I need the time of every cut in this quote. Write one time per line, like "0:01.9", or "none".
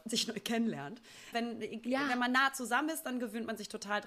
0:01.3

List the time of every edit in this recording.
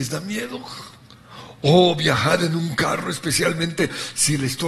none

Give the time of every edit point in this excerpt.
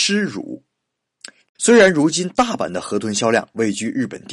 0:01.4

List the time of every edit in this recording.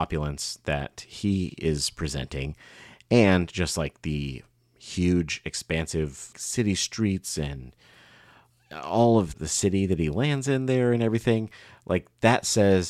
0:06.3
0:09.3

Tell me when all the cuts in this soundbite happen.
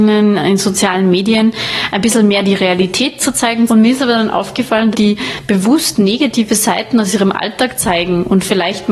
0:03.7
0:04.9

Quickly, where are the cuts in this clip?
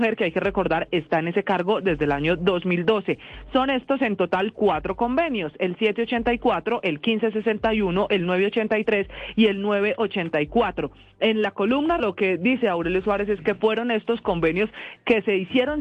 0:12.0

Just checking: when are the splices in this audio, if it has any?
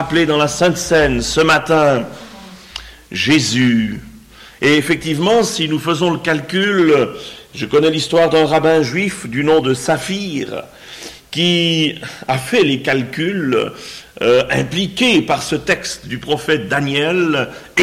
none

